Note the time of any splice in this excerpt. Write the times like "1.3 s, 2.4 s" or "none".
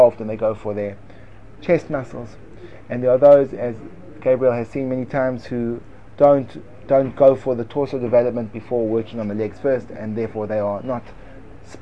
none